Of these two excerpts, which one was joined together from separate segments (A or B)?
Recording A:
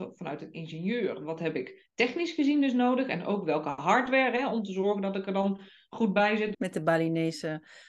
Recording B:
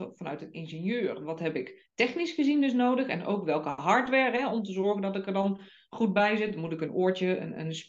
A